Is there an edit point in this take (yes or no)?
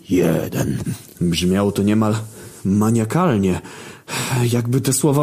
no